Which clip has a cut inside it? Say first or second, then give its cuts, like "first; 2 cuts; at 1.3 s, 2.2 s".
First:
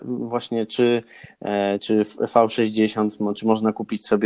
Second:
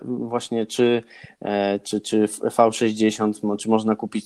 first; 1 cut; at 1.8 s